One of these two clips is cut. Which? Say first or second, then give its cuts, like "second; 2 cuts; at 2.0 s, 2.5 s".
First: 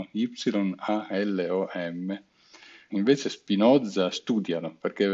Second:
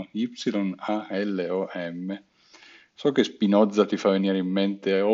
first; 2 cuts; at 2.9 s, 4.1 s